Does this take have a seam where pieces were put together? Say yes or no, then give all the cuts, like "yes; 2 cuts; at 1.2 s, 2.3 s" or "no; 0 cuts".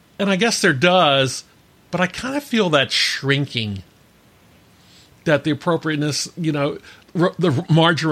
yes; 1 cut; at 7.0 s